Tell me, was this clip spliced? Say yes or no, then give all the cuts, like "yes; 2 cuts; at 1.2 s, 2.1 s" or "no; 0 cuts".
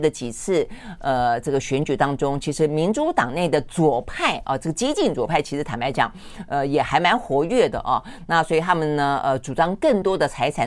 no; 0 cuts